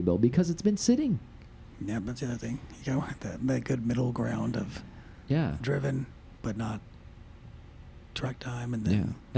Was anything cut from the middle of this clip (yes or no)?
no